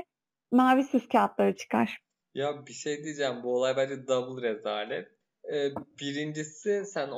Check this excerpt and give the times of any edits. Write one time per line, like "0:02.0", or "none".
none